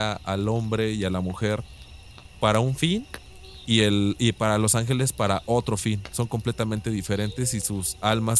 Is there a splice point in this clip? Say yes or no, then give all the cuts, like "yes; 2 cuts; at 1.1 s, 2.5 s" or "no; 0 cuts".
no; 0 cuts